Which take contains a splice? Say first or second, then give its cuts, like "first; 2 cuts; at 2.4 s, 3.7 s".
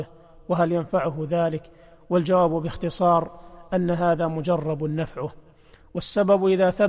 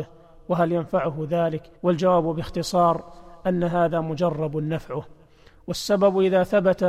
second; 1 cut; at 1.8 s